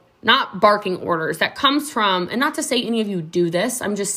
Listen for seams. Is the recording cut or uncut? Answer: uncut